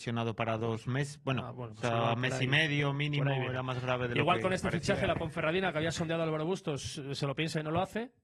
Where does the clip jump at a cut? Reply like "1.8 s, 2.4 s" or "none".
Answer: none